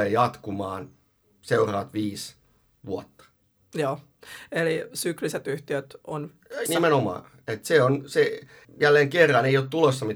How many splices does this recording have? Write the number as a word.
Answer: two